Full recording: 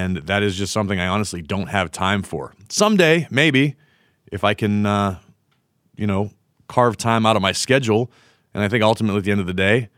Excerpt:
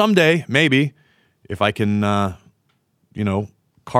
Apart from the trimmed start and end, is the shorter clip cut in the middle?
no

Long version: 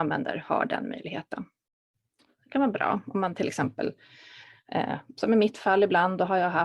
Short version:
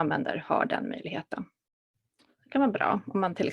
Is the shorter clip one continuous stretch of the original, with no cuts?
yes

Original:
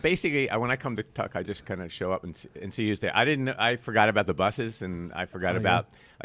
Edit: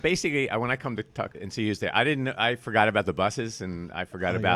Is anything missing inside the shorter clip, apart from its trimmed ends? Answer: yes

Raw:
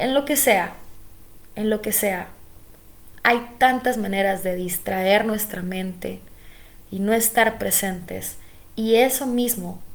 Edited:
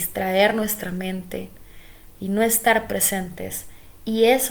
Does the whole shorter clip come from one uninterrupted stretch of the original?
yes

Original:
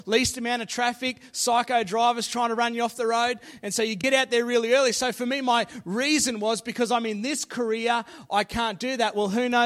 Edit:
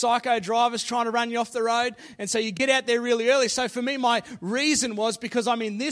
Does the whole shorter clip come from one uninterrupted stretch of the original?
yes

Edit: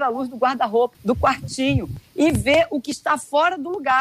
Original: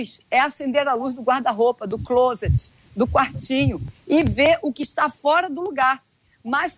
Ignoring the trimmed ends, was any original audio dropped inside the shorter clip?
yes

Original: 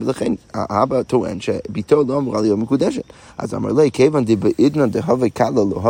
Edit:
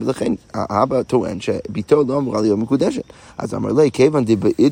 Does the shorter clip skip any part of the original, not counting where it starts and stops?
no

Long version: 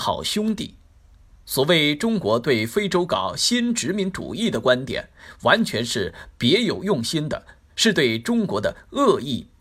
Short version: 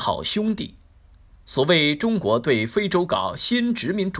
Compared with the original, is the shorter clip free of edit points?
yes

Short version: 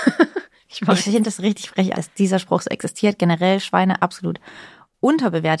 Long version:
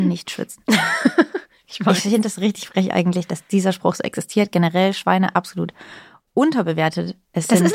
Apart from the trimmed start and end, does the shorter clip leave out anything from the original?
yes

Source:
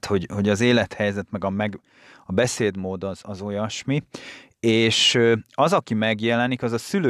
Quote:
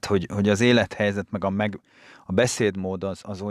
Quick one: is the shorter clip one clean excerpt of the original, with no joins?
yes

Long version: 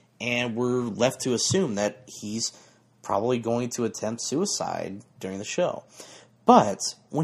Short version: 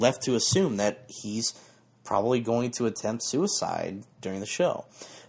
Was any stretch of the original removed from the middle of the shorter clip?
no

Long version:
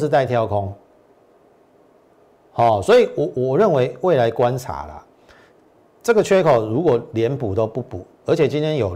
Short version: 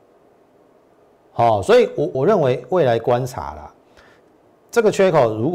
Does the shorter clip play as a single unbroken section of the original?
no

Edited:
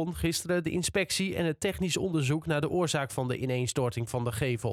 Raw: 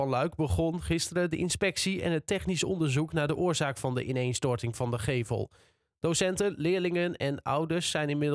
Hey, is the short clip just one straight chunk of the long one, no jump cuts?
yes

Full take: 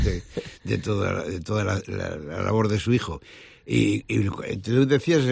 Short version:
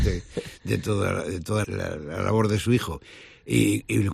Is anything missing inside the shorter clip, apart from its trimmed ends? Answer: yes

